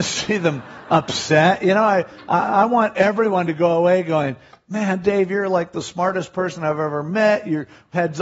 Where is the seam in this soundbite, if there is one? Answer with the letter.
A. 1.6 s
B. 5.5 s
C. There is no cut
C